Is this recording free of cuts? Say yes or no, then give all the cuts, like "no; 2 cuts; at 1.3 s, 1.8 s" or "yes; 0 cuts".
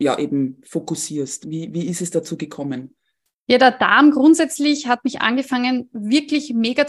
yes; 0 cuts